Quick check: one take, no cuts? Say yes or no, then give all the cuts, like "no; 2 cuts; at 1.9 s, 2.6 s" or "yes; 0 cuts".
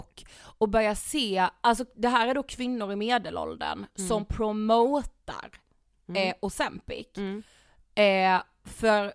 yes; 0 cuts